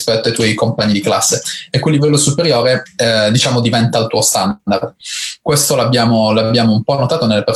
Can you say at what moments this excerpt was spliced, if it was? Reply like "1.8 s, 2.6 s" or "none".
none